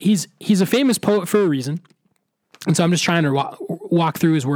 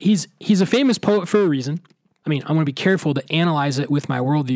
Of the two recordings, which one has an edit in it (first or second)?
second